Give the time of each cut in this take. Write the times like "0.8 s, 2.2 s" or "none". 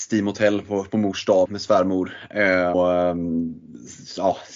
1.5 s, 2.7 s